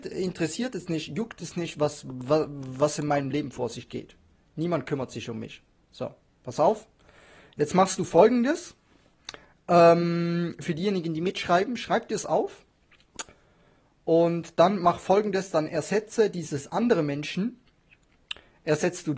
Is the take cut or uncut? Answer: uncut